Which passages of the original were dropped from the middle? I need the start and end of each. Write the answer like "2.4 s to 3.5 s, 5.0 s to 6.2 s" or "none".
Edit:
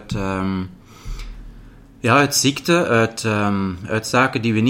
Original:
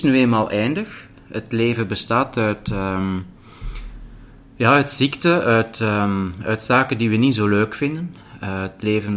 none